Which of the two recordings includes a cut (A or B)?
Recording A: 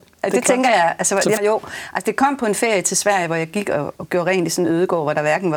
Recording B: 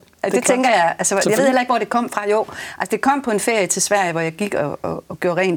A